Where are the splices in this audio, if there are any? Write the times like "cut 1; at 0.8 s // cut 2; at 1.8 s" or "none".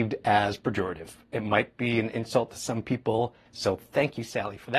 cut 1; at 3.5 s